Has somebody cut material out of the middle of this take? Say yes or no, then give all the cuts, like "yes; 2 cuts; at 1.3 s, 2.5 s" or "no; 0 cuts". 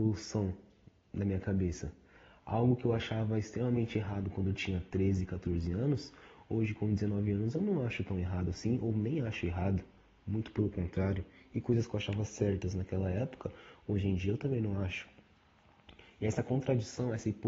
no; 0 cuts